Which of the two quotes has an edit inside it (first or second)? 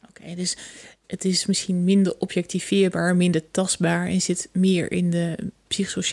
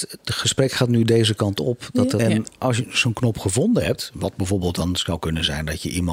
second